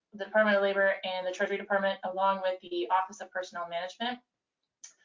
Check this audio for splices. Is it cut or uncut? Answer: uncut